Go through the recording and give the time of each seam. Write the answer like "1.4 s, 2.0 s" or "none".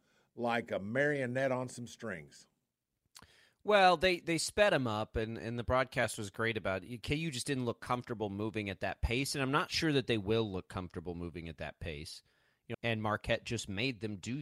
12.7 s